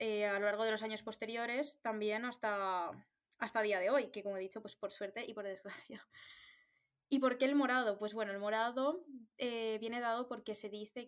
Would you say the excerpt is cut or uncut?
uncut